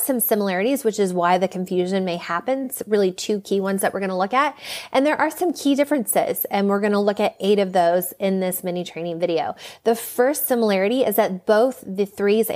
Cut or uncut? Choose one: uncut